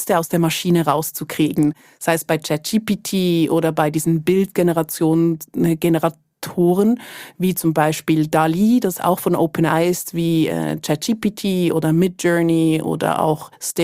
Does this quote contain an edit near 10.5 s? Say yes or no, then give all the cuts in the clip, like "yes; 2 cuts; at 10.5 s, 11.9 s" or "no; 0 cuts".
no; 0 cuts